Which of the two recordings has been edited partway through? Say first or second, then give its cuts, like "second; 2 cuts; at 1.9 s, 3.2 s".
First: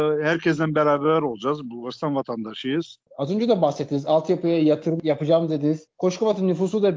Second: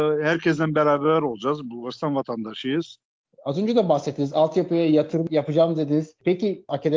first; 2 cuts; at 3.1 s, 5.9 s